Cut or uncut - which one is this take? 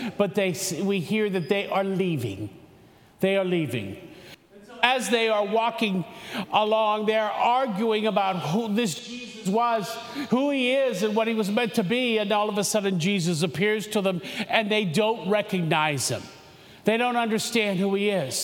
uncut